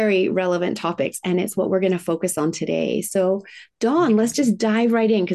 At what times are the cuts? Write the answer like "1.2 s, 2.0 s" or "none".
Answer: none